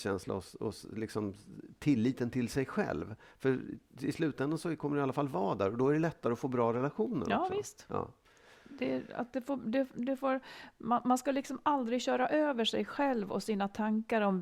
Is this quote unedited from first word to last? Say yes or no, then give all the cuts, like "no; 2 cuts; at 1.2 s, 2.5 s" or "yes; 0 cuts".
yes; 0 cuts